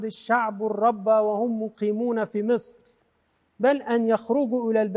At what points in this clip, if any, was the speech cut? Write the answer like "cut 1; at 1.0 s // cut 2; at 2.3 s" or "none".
none